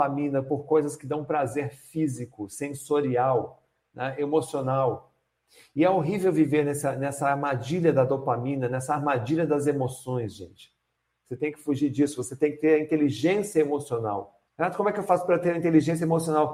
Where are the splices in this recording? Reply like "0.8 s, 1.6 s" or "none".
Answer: 14.5 s